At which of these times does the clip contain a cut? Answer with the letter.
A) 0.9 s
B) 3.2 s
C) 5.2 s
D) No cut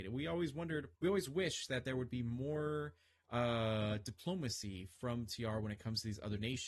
A